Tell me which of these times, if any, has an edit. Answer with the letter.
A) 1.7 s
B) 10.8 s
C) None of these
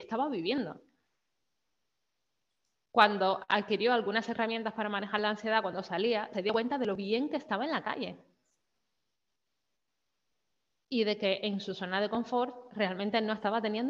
C